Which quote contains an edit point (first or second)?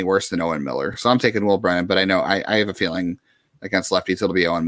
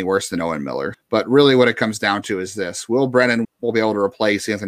second